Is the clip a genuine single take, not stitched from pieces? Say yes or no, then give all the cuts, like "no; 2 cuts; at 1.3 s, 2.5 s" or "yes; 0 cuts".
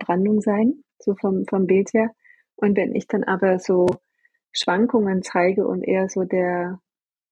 yes; 0 cuts